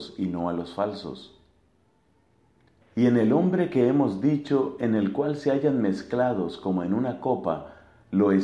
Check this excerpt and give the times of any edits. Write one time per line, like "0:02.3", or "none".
0:02.8

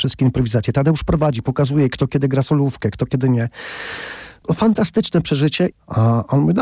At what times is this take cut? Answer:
0:05.7

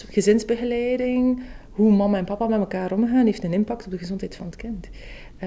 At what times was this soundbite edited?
none

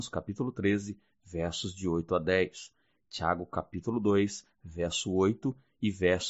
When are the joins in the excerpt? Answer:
none

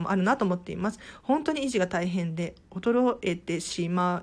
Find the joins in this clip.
none

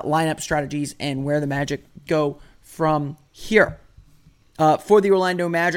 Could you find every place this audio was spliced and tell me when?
0:04.4

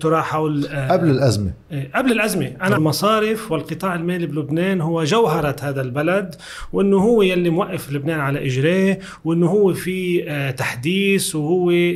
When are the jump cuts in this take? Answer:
0:02.8

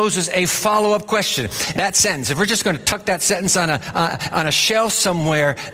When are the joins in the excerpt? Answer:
0:01.7
0:04.3

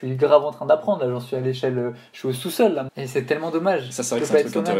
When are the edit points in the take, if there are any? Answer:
0:02.9

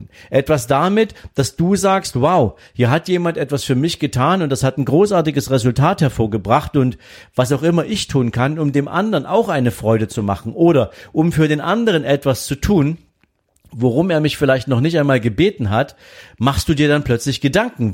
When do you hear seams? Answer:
none

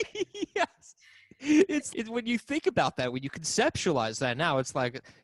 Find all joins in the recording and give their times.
0:01.9

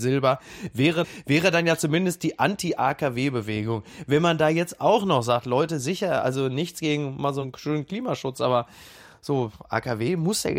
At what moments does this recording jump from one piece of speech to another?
0:01.0

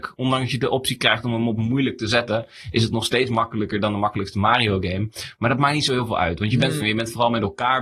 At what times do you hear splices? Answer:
0:06.8

